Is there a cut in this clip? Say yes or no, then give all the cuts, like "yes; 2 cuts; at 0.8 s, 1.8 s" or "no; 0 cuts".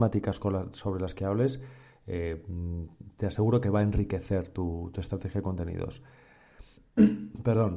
yes; 1 cut; at 6.8 s